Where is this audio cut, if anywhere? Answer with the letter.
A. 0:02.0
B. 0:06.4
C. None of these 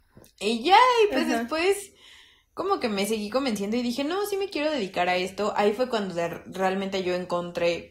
C